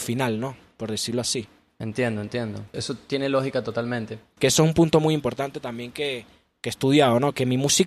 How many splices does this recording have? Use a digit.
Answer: 1